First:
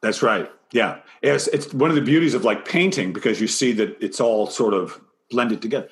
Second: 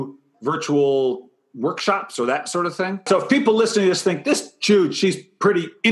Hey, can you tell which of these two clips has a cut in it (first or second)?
second